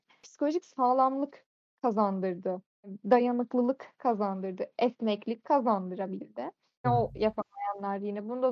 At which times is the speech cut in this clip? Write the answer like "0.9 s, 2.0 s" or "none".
6.8 s